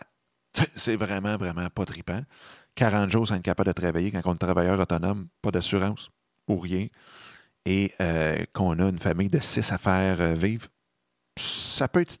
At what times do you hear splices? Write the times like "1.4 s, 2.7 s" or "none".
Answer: none